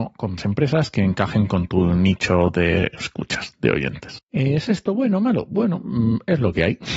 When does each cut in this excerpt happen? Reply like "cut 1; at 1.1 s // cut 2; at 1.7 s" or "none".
none